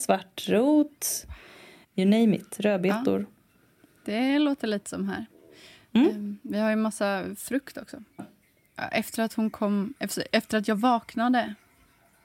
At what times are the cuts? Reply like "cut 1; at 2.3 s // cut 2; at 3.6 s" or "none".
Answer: cut 1; at 1.8 s // cut 2; at 8.2 s

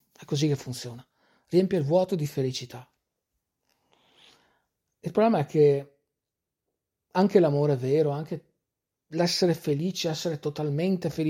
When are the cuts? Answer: none

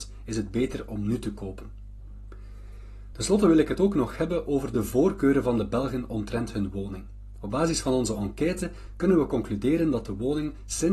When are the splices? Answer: none

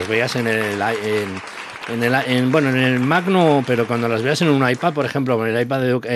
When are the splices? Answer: none

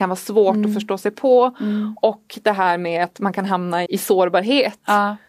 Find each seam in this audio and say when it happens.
cut 1; at 3.9 s

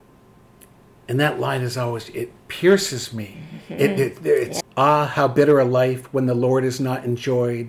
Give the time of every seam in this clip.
cut 1; at 4.6 s

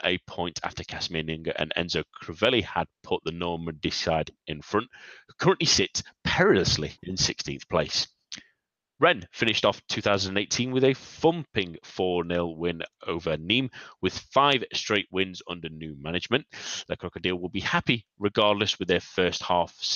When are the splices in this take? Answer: cut 1; at 7.0 s

